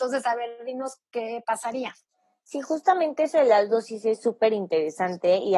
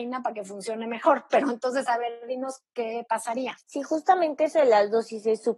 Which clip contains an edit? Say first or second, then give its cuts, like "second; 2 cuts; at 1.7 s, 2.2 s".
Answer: second; 1 cut; at 3.6 s